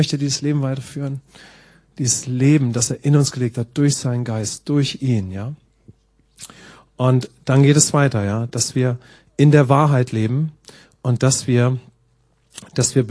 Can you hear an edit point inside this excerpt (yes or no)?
no